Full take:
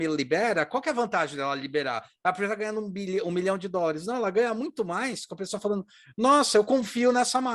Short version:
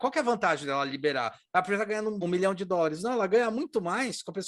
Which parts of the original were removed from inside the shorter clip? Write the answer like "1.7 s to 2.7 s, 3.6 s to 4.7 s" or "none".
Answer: 2.9 s to 3.2 s